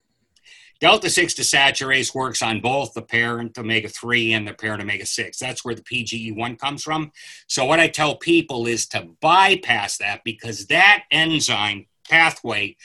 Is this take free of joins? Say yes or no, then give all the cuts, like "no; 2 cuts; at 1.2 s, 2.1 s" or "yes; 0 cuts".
yes; 0 cuts